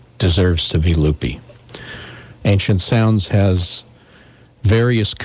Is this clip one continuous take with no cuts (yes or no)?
no